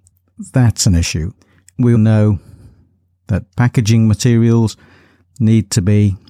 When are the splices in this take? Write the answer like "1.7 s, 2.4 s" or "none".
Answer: 2.0 s